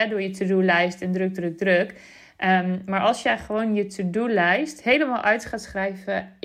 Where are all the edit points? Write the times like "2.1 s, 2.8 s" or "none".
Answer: none